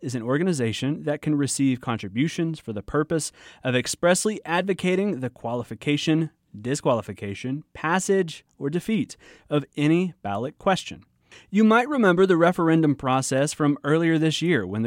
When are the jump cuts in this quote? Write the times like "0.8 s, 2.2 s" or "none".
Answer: 11.3 s